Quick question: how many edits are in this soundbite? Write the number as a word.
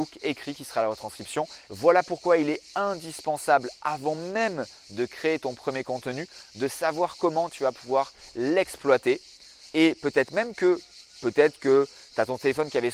two